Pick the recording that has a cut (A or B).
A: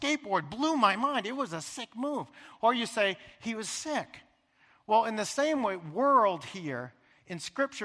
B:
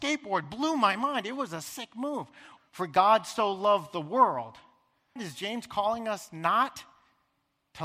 B